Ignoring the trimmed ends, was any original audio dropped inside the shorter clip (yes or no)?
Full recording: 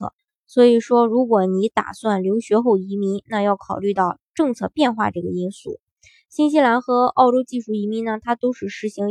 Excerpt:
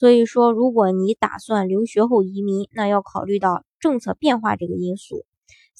no